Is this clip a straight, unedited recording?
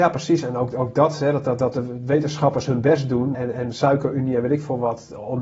no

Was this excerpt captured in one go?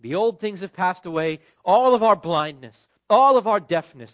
no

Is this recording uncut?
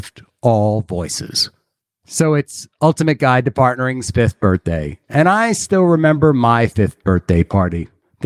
yes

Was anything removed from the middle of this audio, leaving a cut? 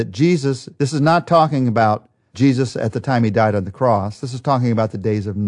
no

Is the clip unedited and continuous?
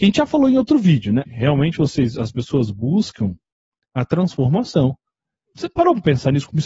no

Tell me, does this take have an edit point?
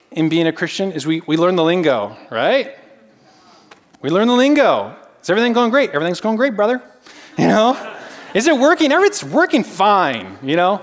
no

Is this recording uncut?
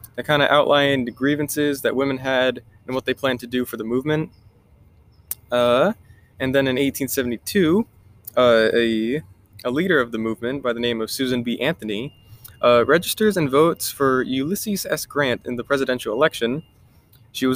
yes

